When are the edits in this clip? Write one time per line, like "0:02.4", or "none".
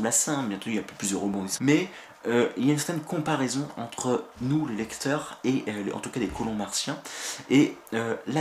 0:01.6